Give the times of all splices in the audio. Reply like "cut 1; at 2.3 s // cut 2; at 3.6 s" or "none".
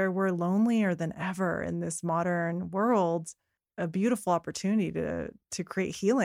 cut 1; at 3.6 s